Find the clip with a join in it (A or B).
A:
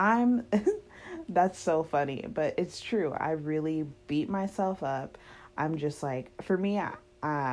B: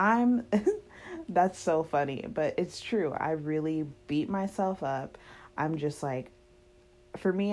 A